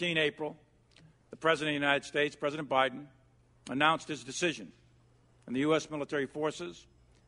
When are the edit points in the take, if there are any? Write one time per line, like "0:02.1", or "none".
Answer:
0:05.9